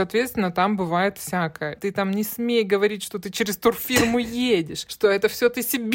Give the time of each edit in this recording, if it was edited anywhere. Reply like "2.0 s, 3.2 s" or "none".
1.8 s